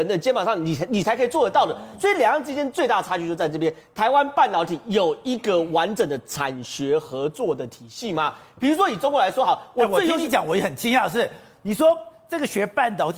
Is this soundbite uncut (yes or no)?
yes